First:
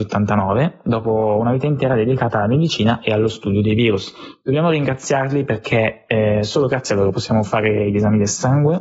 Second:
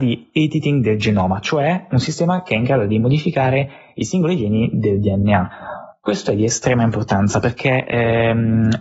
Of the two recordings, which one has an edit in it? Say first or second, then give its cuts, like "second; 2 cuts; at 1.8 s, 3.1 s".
second; 1 cut; at 1.9 s